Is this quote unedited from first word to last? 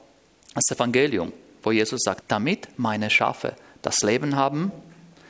no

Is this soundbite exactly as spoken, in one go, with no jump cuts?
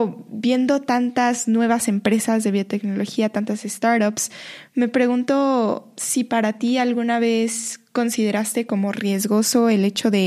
yes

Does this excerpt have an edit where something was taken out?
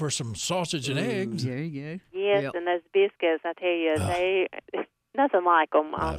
no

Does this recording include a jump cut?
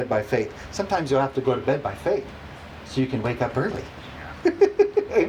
no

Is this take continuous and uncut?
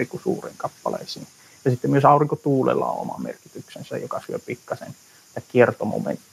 yes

